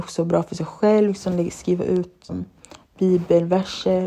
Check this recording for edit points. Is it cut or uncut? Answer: cut